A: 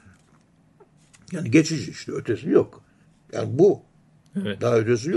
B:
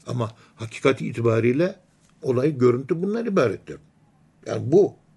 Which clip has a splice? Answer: A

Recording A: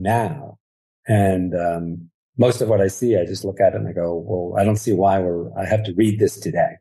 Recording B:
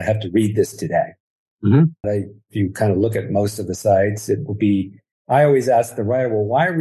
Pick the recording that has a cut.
B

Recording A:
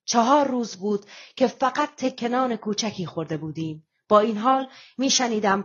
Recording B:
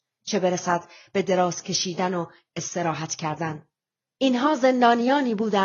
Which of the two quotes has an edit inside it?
B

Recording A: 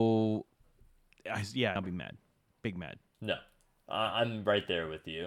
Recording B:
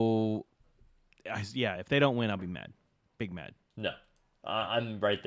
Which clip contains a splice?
A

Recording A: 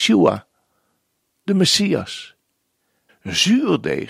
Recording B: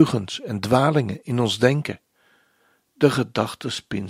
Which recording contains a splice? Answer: A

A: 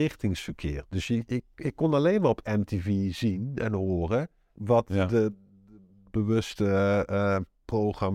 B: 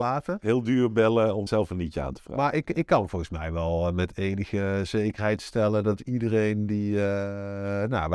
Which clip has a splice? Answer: B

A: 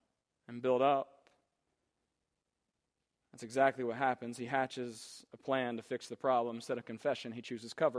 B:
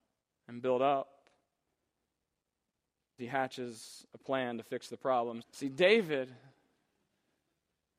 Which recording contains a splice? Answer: B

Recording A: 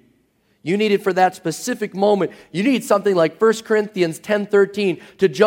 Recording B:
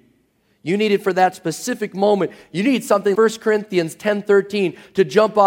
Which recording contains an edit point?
B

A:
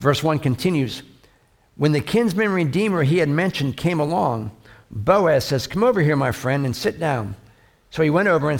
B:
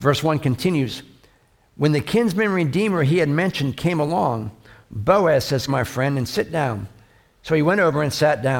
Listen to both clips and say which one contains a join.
B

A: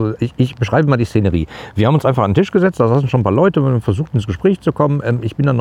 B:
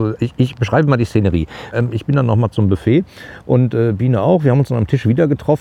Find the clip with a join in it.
B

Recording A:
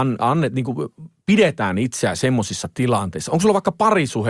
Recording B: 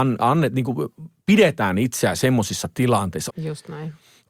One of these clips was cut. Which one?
B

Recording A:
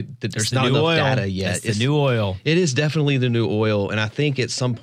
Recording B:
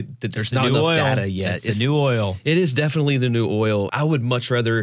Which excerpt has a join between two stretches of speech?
B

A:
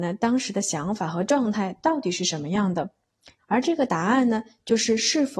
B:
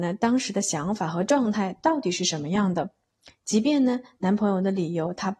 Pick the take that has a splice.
A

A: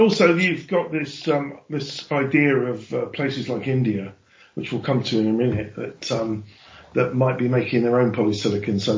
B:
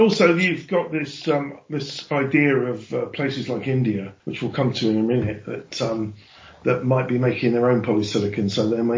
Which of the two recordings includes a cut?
B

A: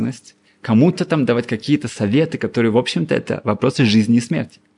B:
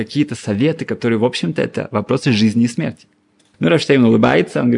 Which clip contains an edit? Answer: B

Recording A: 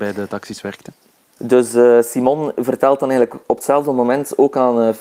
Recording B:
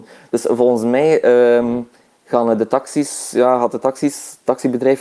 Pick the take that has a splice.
A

